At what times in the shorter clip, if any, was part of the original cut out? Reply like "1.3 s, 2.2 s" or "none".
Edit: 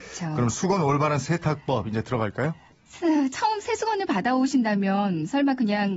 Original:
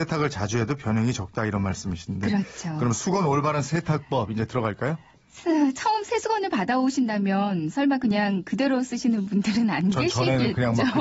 none